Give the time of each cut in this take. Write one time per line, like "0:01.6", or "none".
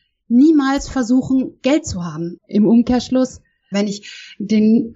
0:02.4
0:03.7

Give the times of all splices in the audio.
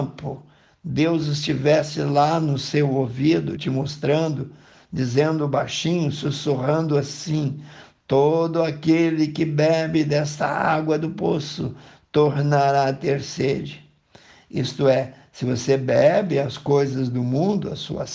0:03.6

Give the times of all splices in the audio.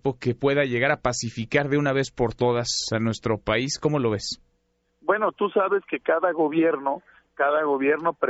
none

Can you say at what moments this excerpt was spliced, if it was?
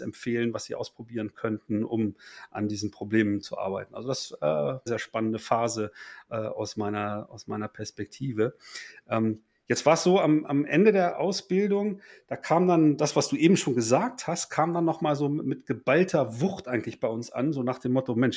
0:04.9

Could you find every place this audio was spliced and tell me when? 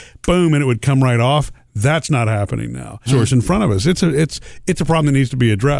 0:03.1

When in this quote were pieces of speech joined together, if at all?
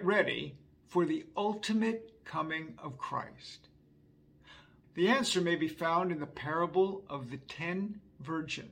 0:04.8

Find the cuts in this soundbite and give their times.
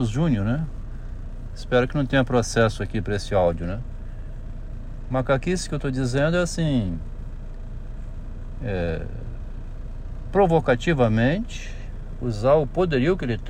0:01.5

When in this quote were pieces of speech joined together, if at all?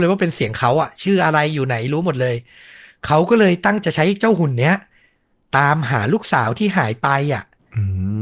0:03.8

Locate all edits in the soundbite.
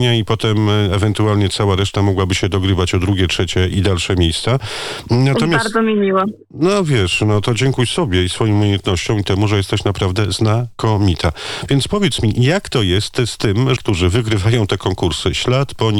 0:03.7
0:13.8

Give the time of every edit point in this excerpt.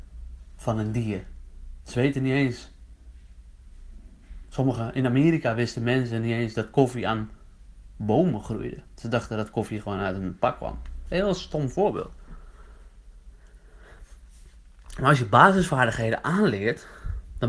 0:01.8

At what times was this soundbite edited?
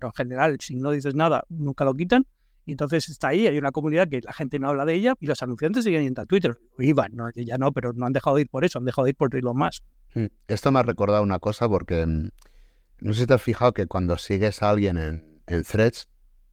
0:05.2

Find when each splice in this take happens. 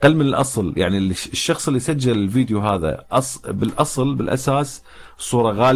none

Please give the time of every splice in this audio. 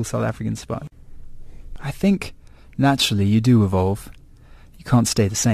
none

